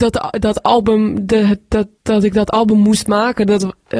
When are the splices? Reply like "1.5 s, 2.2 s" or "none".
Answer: none

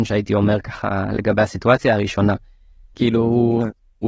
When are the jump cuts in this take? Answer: 2.9 s

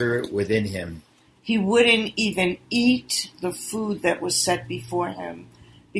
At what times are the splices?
1.3 s

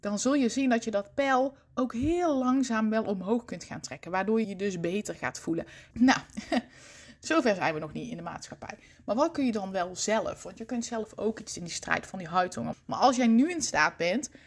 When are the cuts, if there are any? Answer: 4.4 s, 5.9 s, 12.7 s

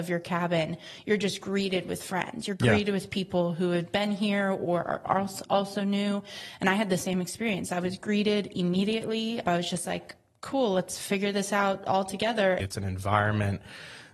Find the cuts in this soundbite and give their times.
9.4 s, 12.6 s

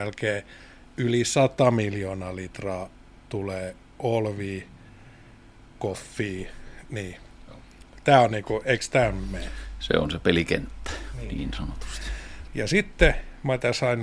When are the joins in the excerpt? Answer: 12.5 s

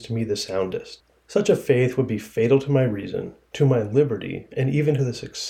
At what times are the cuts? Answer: 1.1 s

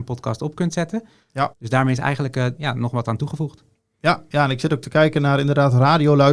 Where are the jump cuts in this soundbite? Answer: 1.5 s, 2.6 s

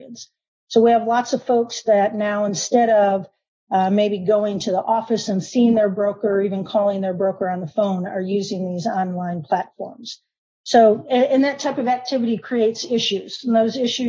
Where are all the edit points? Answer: 10.5 s

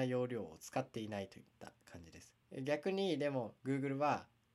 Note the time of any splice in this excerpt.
2.4 s

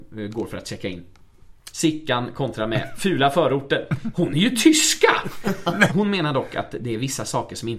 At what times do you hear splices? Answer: 1.7 s, 4.1 s, 5.9 s

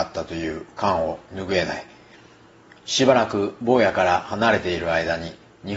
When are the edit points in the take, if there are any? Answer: none

